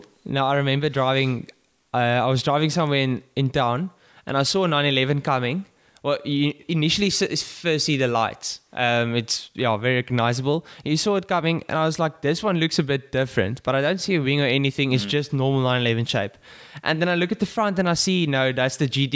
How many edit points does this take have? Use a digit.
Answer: 0